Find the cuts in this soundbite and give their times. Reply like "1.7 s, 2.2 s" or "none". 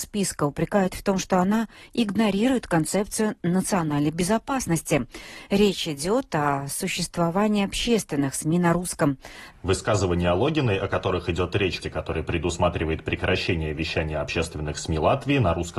9.5 s, 11.8 s